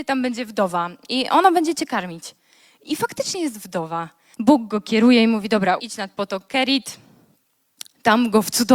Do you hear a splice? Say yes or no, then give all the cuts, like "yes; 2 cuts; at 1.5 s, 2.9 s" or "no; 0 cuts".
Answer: yes; 2 cuts; at 4.3 s, 5.8 s